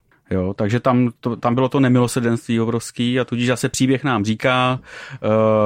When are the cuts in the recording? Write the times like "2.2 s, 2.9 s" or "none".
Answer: none